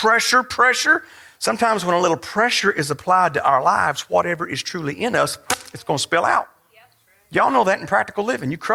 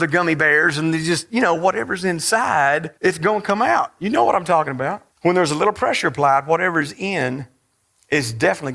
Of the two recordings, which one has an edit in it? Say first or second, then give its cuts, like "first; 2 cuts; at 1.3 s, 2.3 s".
second; 2 cuts; at 3.0 s, 5.1 s